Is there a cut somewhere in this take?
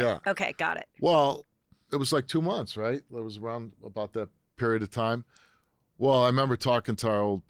no; 0 cuts

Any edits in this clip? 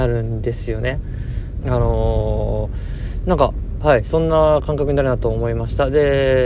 yes; 1 cut; at 1.6 s

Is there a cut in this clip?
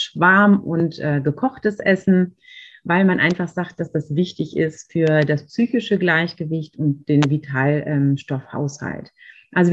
no; 0 cuts

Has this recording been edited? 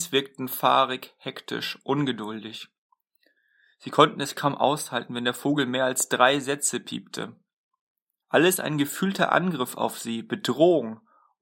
yes; 1 cut; at 8.2 s

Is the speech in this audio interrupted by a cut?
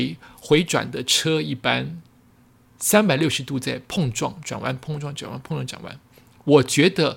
no; 0 cuts

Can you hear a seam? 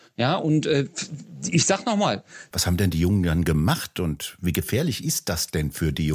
yes; 1 cut; at 2.5 s

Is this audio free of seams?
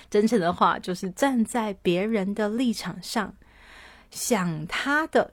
yes; 0 cuts

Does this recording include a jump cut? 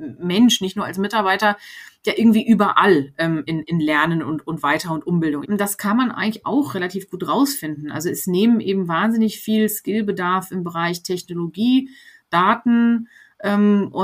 yes; 2 cuts; at 3.5 s, 5.4 s

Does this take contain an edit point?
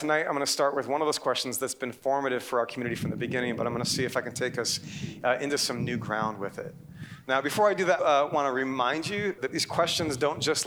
yes; 2 cuts; at 8.0 s, 9.4 s

